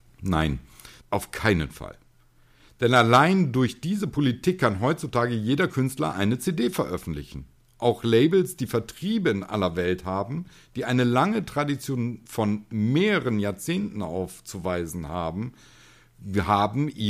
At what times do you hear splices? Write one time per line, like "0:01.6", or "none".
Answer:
0:01.0